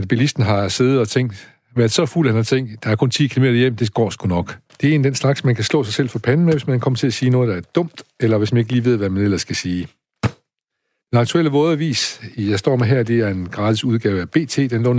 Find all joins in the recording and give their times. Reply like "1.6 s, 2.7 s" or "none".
4.7 s